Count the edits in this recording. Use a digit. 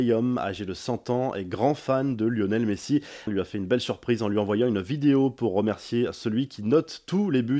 1